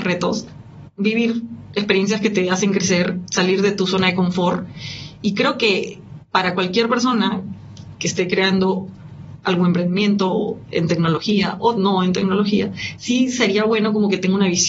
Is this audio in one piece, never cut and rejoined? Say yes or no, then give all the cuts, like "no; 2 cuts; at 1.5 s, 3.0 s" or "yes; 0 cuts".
yes; 0 cuts